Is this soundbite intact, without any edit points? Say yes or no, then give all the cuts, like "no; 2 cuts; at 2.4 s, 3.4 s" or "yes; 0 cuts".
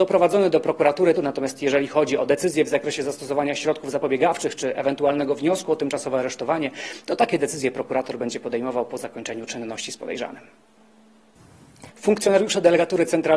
no; 2 cuts; at 1.2 s, 11.9 s